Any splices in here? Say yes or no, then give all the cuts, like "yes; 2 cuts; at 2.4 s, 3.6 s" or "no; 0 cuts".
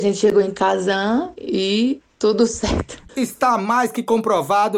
yes; 1 cut; at 3.1 s